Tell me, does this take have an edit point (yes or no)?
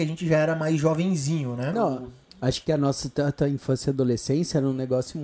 yes